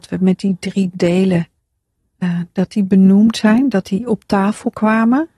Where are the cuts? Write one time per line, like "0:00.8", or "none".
none